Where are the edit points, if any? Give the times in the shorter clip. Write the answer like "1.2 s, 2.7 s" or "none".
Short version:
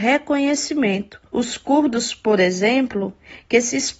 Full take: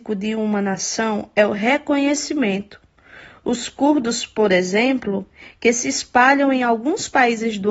1.3 s